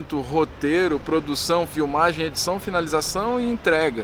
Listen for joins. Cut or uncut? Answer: uncut